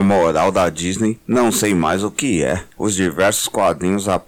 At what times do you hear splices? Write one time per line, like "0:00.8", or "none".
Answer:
0:02.7

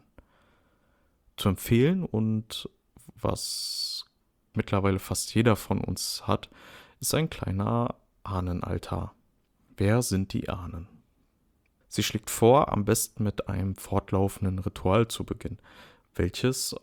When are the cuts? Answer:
0:04.5
0:09.7
0:11.8

